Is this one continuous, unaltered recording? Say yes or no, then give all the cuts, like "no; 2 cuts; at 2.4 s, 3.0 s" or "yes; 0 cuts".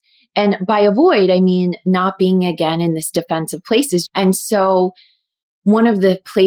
no; 1 cut; at 4.1 s